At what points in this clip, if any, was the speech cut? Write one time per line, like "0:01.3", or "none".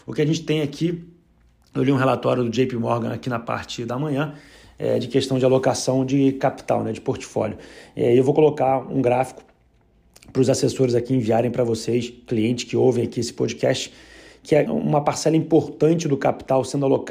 0:14.7